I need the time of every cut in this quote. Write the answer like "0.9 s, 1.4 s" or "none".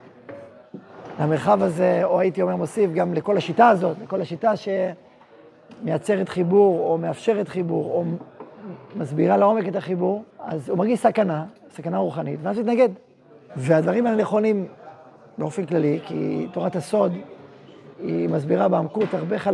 10.3 s, 13.5 s